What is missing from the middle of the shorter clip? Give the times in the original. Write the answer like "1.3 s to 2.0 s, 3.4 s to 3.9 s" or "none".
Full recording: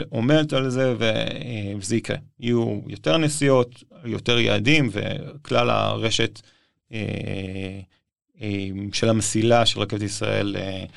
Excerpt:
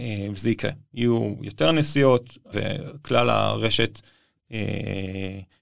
4.0 s to 4.9 s